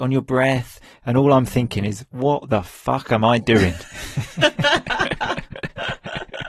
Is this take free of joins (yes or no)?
yes